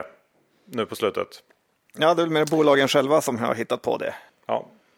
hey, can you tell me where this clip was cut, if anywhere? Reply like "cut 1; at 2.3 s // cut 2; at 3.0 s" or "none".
none